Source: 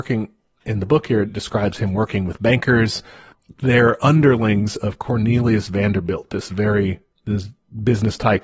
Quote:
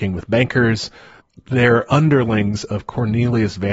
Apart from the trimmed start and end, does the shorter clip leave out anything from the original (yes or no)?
no